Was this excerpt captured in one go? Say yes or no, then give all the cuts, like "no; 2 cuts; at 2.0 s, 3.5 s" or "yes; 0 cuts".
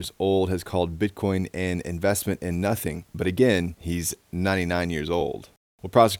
yes; 0 cuts